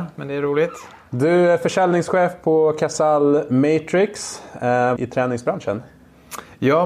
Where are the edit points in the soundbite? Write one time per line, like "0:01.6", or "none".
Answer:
0:05.0